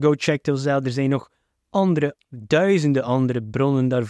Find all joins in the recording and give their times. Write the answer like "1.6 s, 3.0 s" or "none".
2.1 s